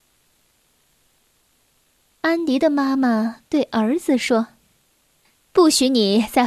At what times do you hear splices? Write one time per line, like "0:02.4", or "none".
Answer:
none